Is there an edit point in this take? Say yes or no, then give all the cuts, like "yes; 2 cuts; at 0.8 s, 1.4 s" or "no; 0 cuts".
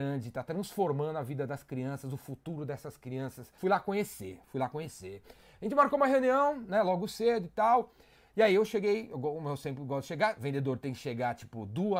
yes; 1 cut; at 3.6 s